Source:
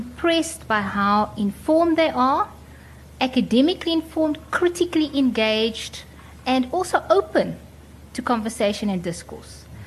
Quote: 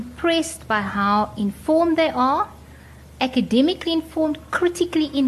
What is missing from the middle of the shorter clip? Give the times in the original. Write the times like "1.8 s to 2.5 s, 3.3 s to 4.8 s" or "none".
none